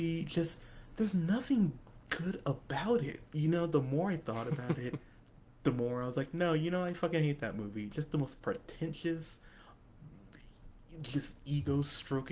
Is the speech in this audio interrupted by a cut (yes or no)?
yes